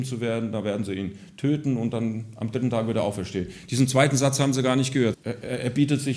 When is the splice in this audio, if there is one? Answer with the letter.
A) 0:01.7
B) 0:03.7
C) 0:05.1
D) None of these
C